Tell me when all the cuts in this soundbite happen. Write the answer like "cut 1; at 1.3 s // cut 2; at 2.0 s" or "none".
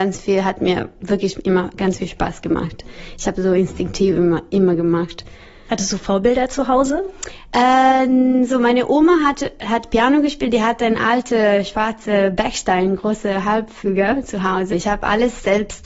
cut 1; at 14.7 s